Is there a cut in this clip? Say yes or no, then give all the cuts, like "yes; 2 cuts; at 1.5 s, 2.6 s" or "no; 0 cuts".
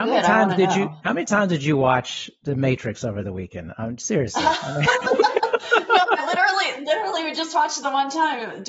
no; 0 cuts